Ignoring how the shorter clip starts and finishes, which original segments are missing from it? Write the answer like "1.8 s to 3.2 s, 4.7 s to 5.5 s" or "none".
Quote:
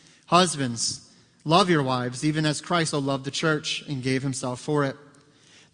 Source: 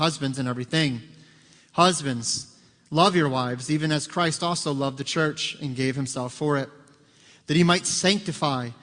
4.4 s to 4.6 s